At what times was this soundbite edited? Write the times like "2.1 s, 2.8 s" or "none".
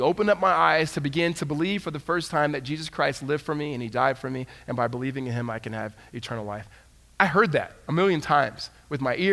none